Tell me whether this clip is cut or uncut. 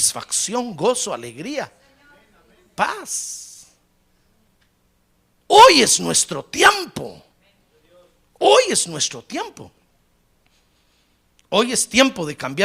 uncut